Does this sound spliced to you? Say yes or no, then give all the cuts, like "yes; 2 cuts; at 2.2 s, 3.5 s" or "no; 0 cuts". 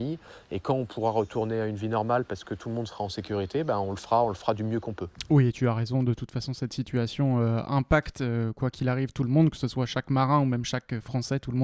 no; 0 cuts